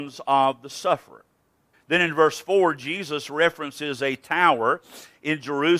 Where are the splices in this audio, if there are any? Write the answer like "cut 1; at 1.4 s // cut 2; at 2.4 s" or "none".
cut 1; at 1.7 s